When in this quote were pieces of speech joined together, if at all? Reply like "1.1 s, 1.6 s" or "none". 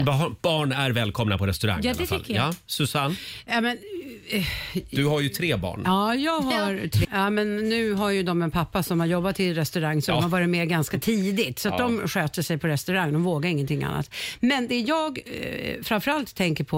7.0 s